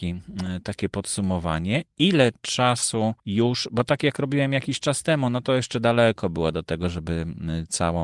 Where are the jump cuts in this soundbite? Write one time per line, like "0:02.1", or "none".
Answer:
0:03.2